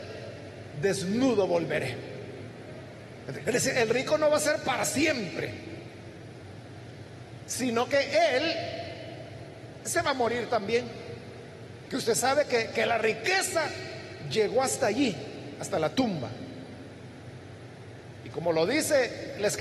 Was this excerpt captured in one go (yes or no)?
no